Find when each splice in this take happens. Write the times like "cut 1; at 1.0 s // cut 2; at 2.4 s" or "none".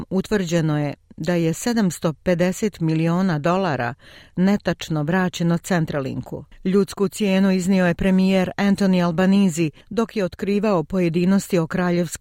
cut 1; at 6.5 s